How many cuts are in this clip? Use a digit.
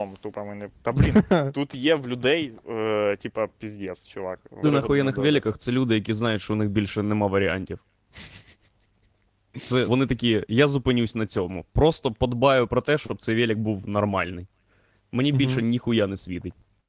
2